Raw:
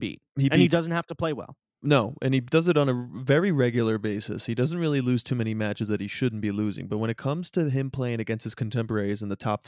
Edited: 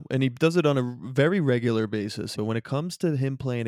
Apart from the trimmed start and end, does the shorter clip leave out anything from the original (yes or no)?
yes